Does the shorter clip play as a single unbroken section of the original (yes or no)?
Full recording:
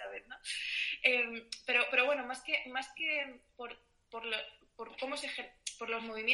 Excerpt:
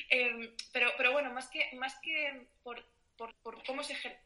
no